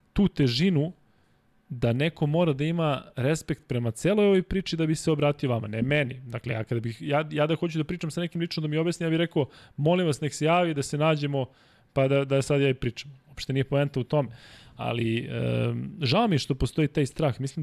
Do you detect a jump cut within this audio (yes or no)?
no